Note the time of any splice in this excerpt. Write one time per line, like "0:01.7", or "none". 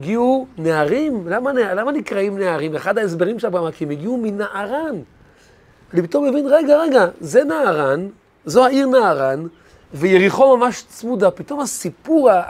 none